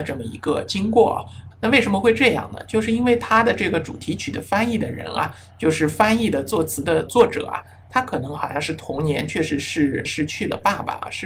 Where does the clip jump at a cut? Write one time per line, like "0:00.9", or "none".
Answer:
0:01.5